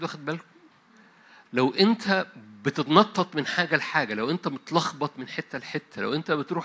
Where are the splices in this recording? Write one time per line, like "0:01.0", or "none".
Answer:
0:01.4